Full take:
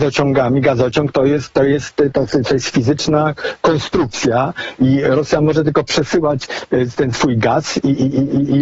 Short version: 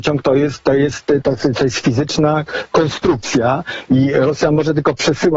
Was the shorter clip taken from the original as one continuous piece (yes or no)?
yes